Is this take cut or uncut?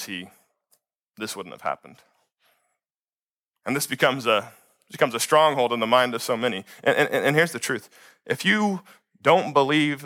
uncut